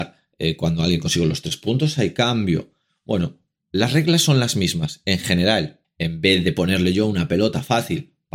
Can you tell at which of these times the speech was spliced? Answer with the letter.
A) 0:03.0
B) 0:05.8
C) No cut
B